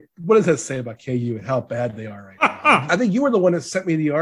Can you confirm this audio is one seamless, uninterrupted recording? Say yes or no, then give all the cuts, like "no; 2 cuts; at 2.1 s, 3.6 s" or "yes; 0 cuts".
no; 1 cut; at 2.9 s